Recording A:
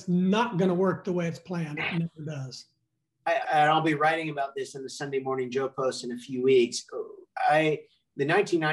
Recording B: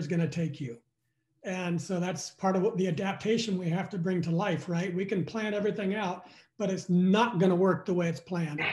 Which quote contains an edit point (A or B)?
A